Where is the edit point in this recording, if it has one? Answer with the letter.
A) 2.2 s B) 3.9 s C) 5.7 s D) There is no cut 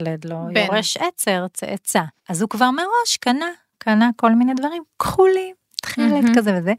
A